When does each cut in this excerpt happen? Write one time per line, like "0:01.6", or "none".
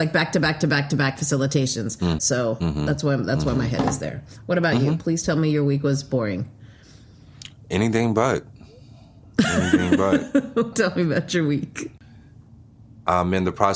0:02.2
0:10.7